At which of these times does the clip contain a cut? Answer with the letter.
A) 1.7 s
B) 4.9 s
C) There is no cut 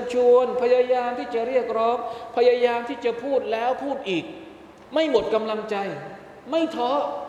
B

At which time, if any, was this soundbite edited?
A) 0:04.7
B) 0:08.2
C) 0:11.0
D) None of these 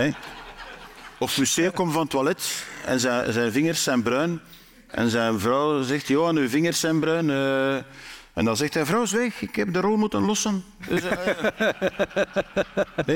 D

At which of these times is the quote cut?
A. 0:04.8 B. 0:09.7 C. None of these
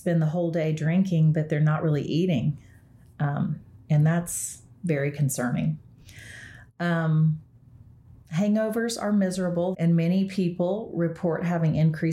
B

